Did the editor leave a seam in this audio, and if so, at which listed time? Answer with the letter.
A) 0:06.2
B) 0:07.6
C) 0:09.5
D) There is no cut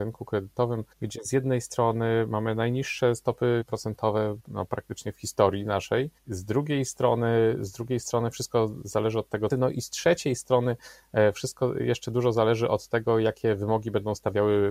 C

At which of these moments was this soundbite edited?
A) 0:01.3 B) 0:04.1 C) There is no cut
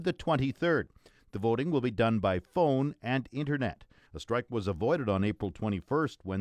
B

